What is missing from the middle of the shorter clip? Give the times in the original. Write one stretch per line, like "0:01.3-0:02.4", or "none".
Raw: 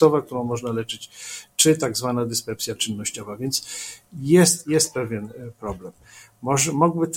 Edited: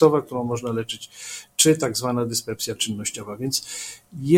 none